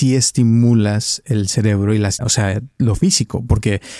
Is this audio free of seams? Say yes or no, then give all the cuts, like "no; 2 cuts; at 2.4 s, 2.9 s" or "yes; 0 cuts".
no; 1 cut; at 2.2 s